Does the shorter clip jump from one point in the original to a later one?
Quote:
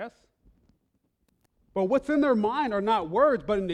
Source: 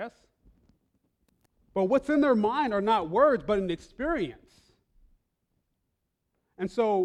no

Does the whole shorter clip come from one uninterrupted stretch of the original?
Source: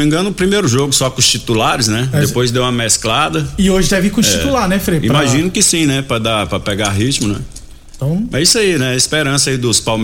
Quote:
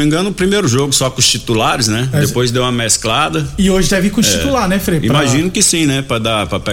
yes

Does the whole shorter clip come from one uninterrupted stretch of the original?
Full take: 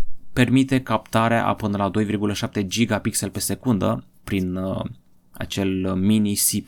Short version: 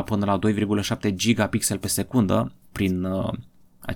yes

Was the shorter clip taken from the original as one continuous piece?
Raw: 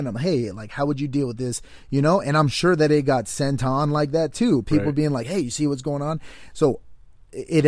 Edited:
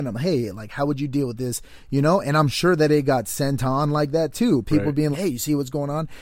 no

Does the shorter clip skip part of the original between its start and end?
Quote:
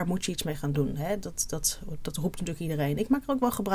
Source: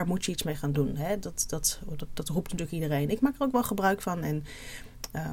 yes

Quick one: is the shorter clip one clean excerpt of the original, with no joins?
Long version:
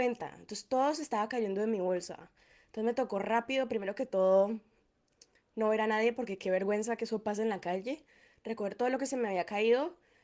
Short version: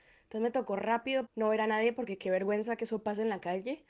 no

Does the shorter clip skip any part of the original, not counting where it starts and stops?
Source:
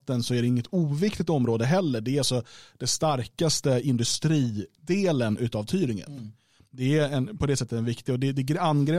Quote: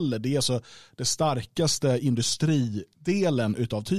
no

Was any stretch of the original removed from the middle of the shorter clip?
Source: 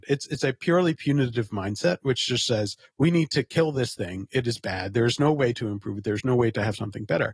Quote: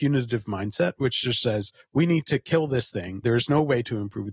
yes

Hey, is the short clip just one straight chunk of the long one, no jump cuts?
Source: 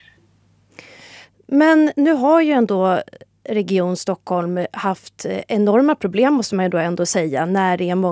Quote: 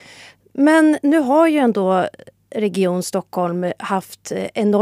yes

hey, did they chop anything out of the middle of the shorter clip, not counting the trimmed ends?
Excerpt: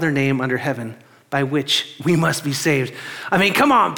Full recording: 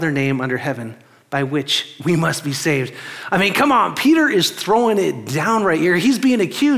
no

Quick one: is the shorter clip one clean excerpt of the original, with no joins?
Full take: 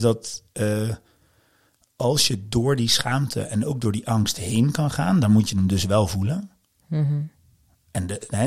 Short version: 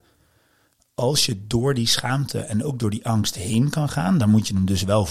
yes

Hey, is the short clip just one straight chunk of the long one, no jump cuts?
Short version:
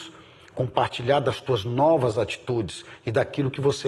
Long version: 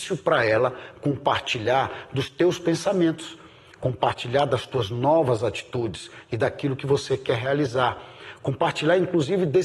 yes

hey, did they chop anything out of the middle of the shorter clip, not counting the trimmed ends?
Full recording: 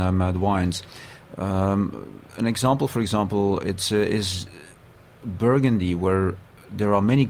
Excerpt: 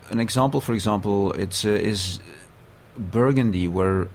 no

